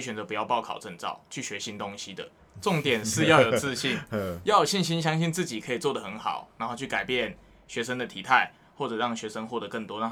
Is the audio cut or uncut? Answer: cut